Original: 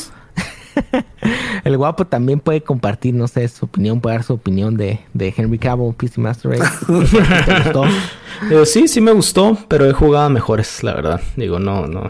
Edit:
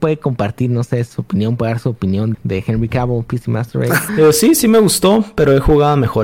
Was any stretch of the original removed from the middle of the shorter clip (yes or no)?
yes